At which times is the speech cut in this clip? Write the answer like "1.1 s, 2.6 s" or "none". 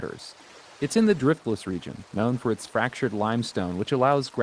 none